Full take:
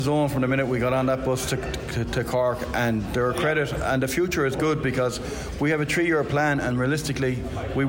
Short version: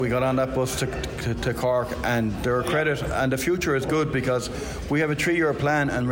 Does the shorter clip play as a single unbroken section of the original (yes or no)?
yes